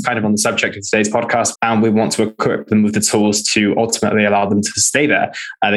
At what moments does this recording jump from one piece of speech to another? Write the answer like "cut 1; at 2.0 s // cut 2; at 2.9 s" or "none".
cut 1; at 1.5 s

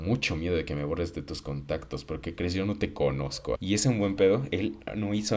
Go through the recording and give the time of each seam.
cut 1; at 3.6 s

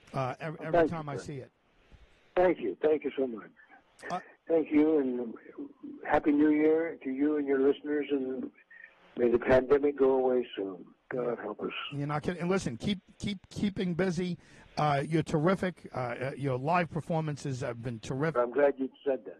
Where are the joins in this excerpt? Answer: cut 1; at 18.4 s

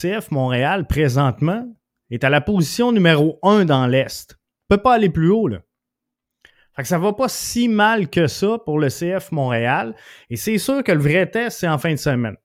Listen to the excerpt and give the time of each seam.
none

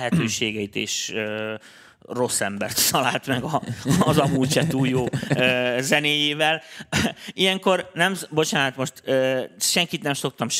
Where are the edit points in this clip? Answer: none

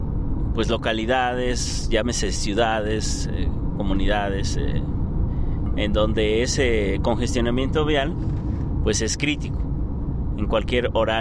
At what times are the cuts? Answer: none

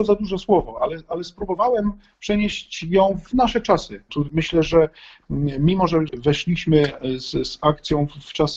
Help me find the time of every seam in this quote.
cut 1; at 4.1 s

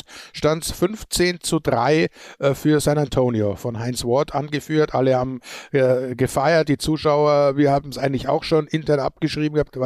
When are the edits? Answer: none

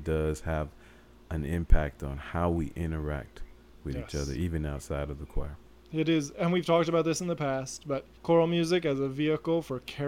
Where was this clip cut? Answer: cut 1; at 5.8 s // cut 2; at 8.1 s

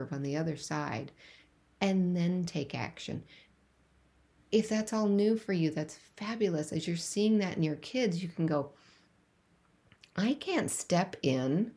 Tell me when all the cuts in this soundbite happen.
none

